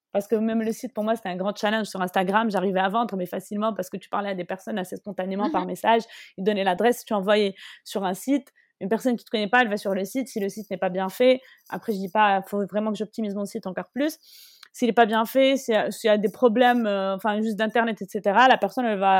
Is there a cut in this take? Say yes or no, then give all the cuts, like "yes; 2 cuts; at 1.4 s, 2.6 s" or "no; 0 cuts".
no; 0 cuts